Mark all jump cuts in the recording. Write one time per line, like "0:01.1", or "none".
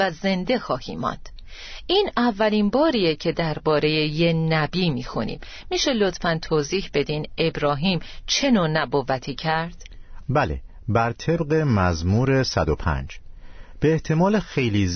0:10.2